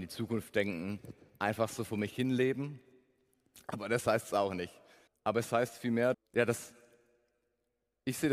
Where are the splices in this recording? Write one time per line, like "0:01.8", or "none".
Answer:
0:05.1
0:06.1

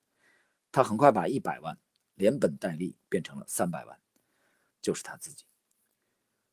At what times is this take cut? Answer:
0:04.7

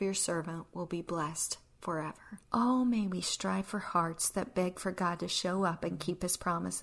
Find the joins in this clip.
0:02.4

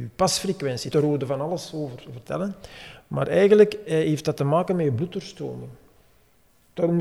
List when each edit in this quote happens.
0:00.9

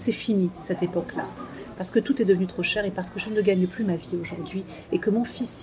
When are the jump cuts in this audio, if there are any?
0:01.8

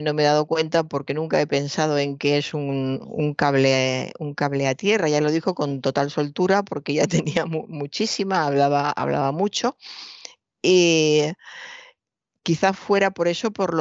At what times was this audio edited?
none

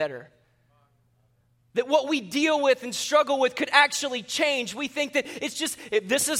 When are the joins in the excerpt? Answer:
none

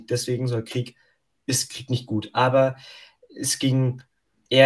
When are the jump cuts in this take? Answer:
none

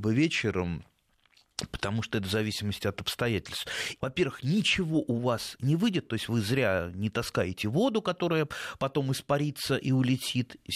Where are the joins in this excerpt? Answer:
0:04.0

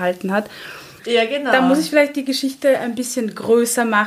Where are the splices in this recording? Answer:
0:01.0

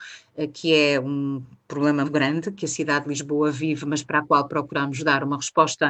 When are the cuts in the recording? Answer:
0:02.1

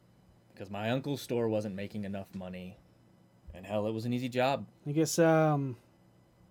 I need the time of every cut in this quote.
0:04.7

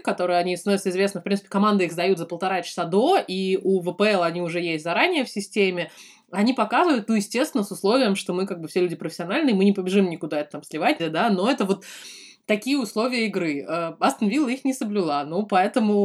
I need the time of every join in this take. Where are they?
0:11.0

